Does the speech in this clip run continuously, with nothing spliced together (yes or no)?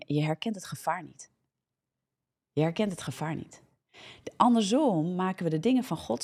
yes